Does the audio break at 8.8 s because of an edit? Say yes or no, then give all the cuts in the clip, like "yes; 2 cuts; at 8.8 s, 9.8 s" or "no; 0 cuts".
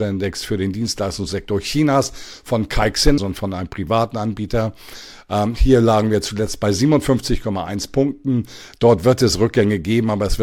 no; 1 cut; at 3.2 s